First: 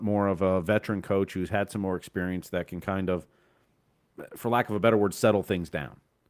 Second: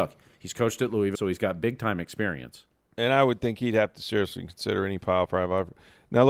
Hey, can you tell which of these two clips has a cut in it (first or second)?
second